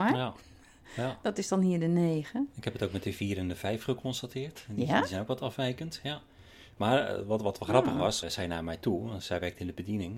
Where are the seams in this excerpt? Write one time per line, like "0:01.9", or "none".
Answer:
0:08.2